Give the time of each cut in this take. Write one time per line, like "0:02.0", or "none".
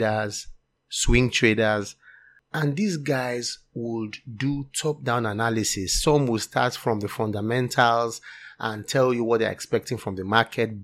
none